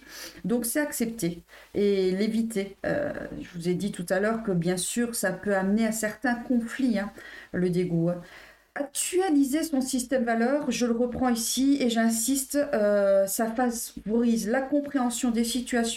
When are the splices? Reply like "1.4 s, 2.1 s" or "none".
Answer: none